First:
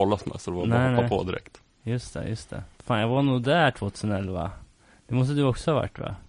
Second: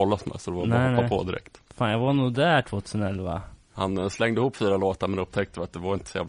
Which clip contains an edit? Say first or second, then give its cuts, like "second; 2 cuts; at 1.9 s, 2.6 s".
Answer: second; 2 cuts; at 1.7 s, 3.7 s